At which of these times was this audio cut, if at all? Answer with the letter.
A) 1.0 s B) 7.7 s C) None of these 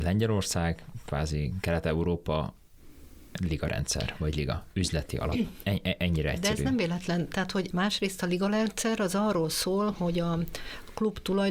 B